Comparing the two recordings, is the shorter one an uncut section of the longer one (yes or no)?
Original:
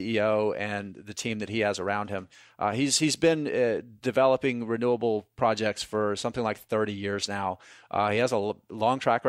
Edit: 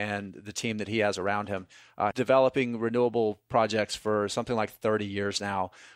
no